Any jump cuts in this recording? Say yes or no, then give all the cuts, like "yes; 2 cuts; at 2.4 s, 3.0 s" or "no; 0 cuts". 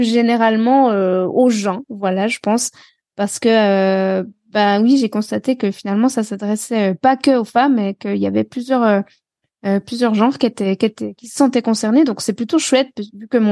no; 0 cuts